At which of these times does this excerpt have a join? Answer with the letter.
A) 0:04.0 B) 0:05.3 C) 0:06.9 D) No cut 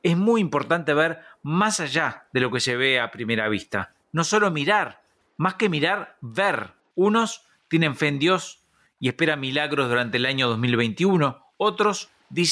C